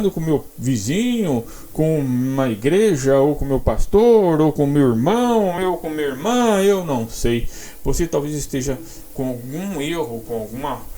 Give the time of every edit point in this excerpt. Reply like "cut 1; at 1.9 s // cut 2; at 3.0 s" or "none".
none